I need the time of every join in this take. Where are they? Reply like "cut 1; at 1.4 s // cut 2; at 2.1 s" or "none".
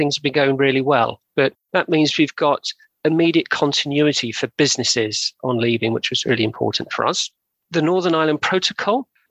cut 1; at 1.3 s